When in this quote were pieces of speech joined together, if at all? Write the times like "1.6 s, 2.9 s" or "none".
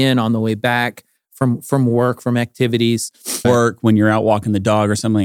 3.4 s